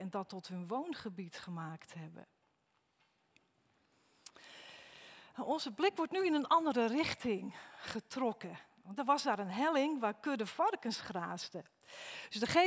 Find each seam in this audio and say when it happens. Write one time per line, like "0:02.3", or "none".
none